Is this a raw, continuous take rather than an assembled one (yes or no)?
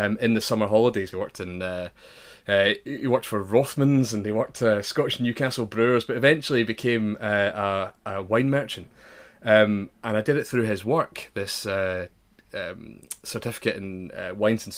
no